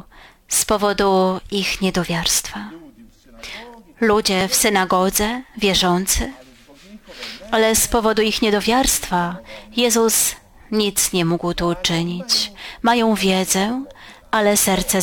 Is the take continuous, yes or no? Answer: yes